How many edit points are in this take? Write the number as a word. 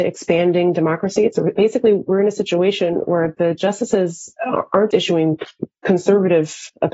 two